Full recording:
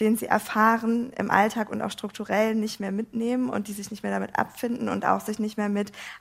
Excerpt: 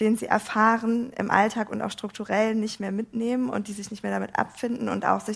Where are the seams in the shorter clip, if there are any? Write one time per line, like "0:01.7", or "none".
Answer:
none